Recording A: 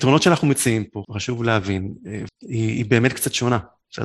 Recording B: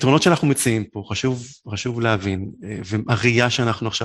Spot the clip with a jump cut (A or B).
A